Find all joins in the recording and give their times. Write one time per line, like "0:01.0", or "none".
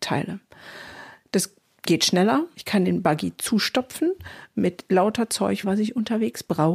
0:02.5
0:05.6